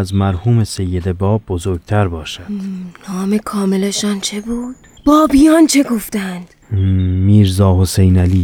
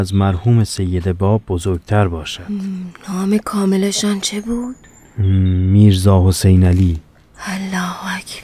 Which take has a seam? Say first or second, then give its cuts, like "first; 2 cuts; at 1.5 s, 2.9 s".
first; 2 cuts; at 5.0 s, 6.6 s